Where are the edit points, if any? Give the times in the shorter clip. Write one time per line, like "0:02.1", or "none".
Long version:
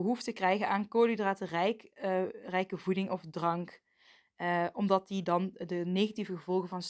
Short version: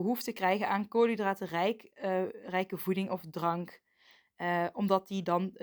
none

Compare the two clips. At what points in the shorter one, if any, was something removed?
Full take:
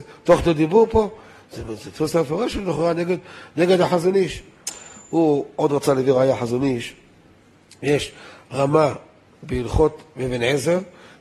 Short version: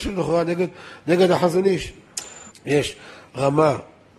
0:02.5

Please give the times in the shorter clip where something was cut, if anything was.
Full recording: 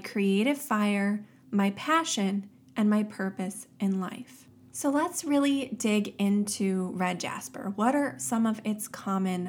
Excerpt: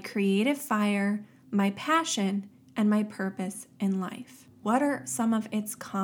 0:04.6

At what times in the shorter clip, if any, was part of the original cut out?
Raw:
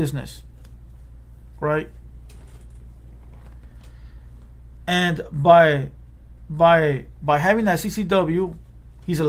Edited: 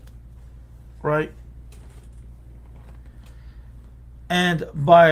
none

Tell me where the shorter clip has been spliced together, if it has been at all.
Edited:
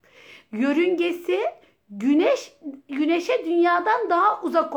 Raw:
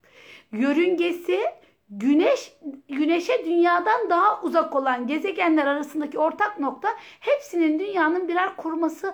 none

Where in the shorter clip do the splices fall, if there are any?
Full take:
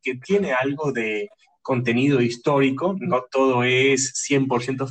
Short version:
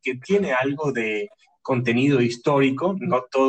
none

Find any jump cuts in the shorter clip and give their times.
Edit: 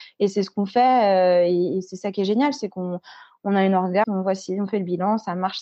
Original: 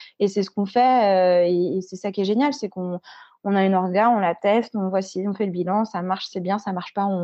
0:04.0

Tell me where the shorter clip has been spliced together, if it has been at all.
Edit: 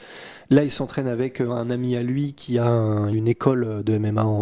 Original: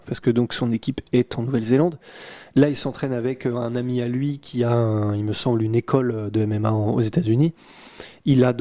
0:03.1

